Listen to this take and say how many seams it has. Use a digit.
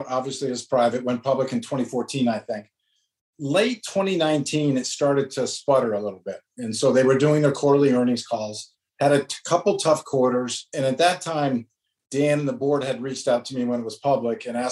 0